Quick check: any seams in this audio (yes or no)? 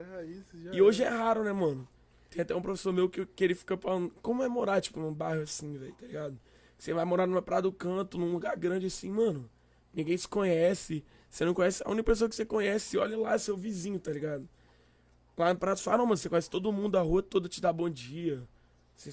no